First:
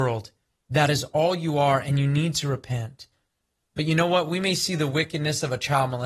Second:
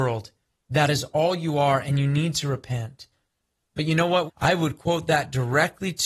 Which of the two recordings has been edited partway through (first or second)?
second